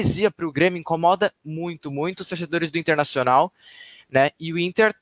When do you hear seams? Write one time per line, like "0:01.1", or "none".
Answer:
0:01.8